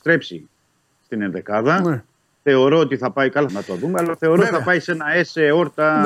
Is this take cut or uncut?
cut